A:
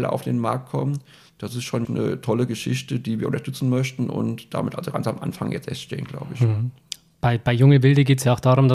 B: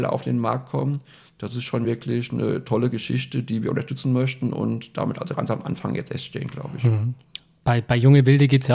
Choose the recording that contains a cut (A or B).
A